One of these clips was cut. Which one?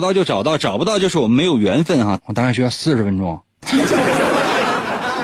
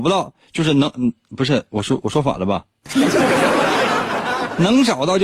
first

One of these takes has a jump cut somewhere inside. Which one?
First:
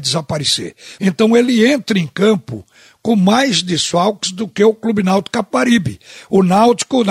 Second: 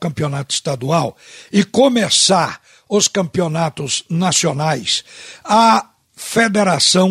first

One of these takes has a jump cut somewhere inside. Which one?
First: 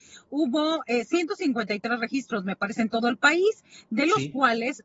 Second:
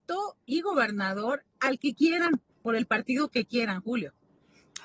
second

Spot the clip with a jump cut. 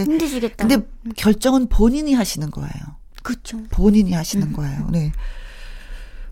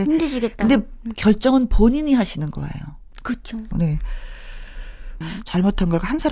second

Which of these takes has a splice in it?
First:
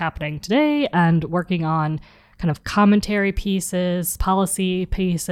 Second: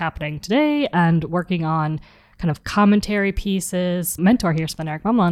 second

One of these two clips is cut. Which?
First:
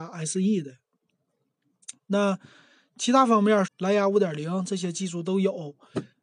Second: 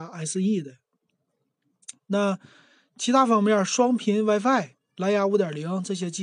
first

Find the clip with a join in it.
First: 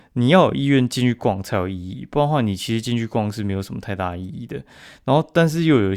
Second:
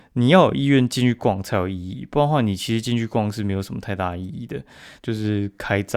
second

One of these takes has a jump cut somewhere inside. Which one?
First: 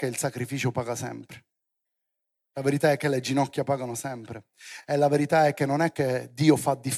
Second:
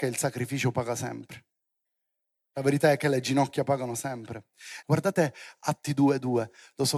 second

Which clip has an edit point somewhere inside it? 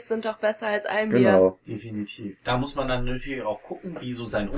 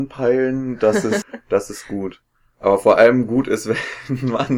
second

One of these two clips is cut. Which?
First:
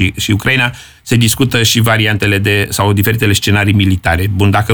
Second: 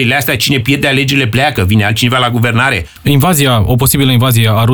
second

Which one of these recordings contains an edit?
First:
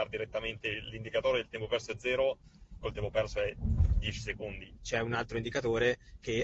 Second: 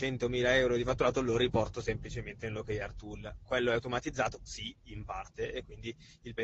first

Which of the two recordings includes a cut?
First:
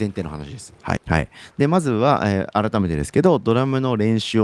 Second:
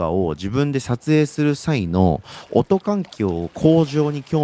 first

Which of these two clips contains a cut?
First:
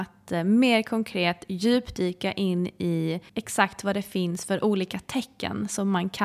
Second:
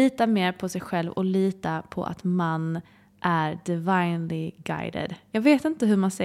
first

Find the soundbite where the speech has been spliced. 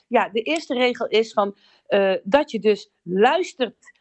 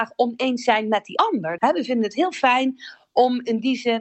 second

